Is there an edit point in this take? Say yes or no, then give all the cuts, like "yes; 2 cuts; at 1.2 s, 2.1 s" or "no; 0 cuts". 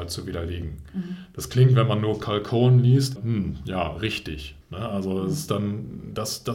yes; 2 cuts; at 3.2 s, 4.6 s